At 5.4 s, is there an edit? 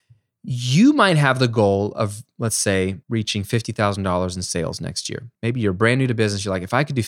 yes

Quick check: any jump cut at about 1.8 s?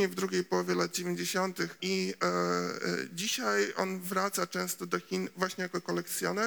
yes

